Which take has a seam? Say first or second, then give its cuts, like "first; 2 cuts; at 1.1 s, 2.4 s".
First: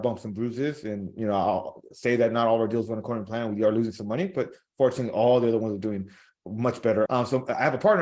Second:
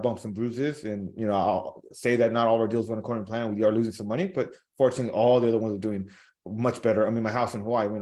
first; 1 cut; at 7.1 s